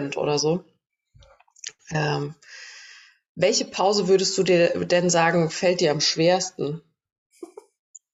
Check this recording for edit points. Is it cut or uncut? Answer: uncut